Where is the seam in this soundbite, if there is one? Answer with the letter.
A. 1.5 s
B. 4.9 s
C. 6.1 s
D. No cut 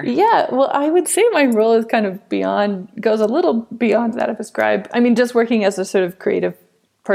D